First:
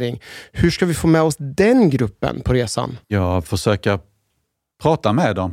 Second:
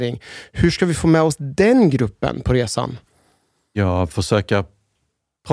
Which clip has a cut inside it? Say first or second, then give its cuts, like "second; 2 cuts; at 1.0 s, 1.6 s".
first; 1 cut; at 3.0 s